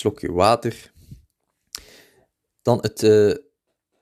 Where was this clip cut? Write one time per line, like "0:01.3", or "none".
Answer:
none